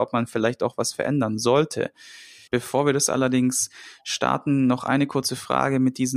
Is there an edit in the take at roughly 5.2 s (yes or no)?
no